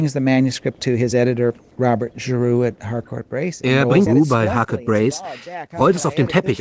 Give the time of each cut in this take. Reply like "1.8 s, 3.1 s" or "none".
4.1 s